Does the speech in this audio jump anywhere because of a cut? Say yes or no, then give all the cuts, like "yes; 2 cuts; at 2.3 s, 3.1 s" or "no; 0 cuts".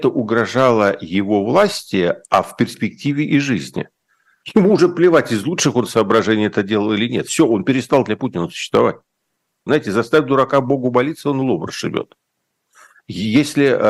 yes; 1 cut; at 9.7 s